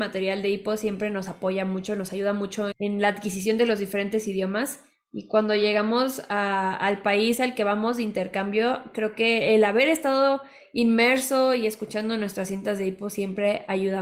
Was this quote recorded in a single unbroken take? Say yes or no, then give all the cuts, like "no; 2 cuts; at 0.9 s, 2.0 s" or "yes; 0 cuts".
no; 1 cut; at 2.7 s